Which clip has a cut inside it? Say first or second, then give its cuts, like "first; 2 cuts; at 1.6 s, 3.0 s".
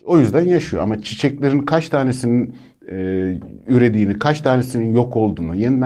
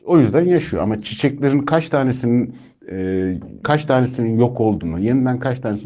second; 1 cut; at 3.6 s